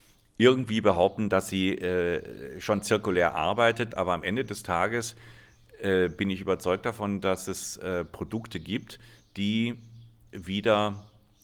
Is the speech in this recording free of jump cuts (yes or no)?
no